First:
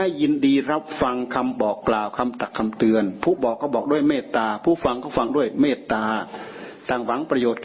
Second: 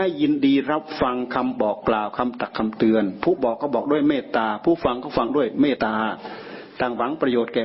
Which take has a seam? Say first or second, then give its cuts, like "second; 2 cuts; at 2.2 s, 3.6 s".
second; 1 cut; at 5.8 s